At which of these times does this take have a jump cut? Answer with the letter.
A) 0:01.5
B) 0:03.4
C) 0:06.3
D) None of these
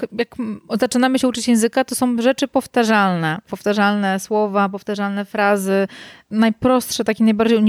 D